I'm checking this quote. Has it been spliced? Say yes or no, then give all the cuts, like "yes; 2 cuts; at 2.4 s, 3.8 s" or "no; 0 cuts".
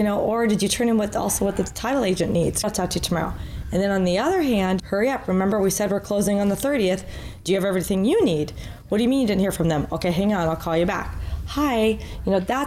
yes; 2 cuts; at 2.6 s, 4.8 s